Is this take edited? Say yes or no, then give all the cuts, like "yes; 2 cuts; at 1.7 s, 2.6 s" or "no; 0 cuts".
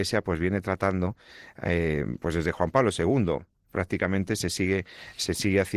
no; 0 cuts